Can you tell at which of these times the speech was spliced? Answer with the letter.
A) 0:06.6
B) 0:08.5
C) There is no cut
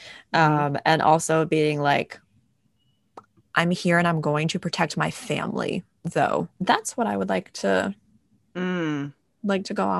A